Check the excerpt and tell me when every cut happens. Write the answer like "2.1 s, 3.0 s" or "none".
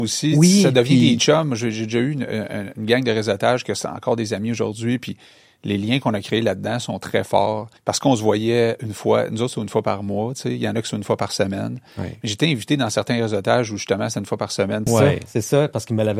7.8 s, 14.9 s